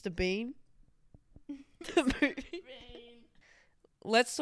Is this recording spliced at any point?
no; 0 cuts

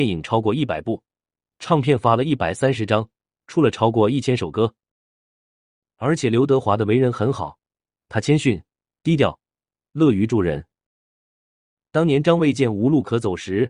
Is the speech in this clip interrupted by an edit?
no; 0 cuts

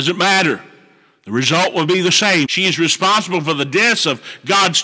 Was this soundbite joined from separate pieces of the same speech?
yes; 1 cut; at 2.4 s

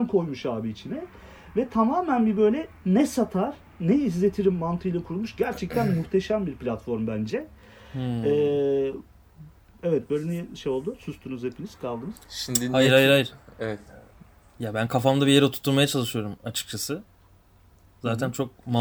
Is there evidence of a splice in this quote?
no; 0 cuts

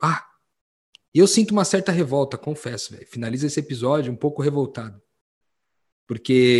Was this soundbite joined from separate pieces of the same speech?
no; 0 cuts

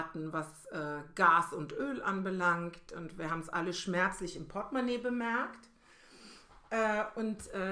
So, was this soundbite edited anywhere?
no; 0 cuts

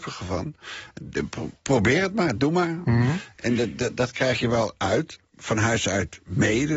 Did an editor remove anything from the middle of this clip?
no; 0 cuts

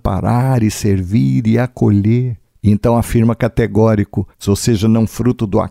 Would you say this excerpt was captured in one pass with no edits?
no; 2 cuts; at 2.5 s, 4.4 s

